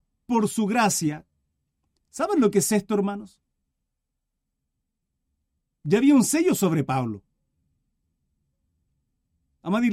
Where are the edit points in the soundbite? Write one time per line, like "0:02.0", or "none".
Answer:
none